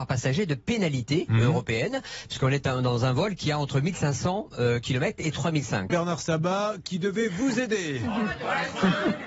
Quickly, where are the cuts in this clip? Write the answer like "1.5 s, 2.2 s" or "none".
5.9 s